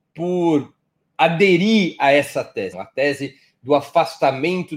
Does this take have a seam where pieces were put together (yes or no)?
yes